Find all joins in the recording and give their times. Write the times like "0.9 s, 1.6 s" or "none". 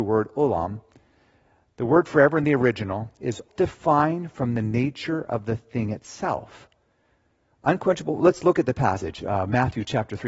3.5 s, 7.5 s